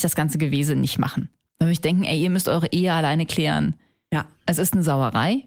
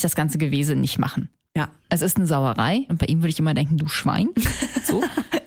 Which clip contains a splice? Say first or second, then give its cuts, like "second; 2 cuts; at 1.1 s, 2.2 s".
second; 2 cuts; at 1.5 s, 2.9 s